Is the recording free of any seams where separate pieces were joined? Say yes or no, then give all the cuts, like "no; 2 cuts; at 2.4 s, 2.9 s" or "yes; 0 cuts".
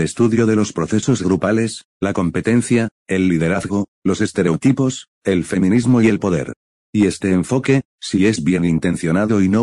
yes; 0 cuts